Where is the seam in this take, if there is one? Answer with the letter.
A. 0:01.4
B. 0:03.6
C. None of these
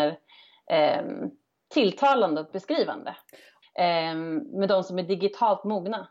B